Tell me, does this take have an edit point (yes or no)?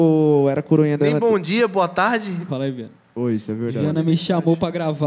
yes